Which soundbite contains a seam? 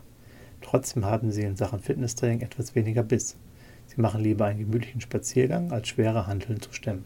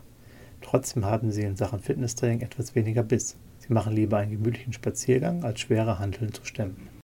second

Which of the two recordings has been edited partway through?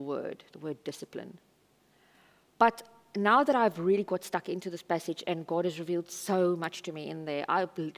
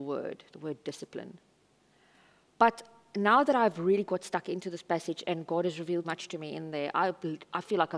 second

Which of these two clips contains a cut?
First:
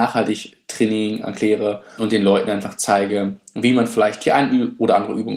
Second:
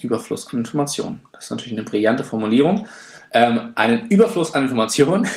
first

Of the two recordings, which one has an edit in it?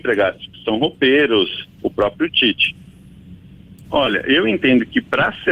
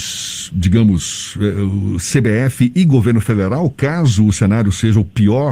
first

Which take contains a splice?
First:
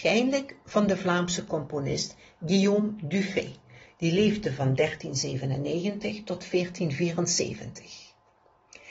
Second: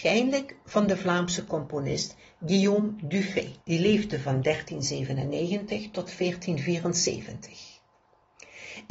second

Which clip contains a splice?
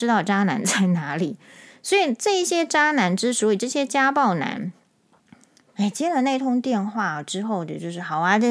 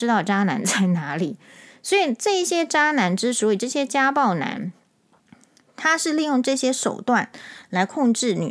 first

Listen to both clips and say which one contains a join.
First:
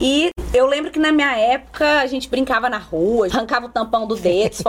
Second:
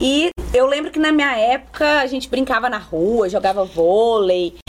first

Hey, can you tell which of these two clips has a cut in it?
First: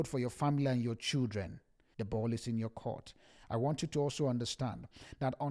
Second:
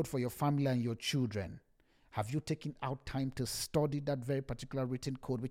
first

